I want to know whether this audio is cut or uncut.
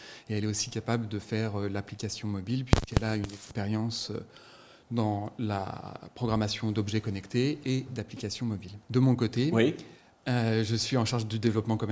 cut